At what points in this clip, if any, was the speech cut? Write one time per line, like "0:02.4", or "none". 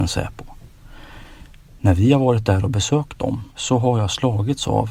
0:03.5